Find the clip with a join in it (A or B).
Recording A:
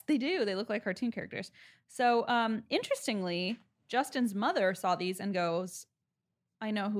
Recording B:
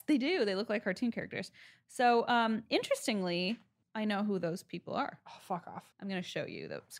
B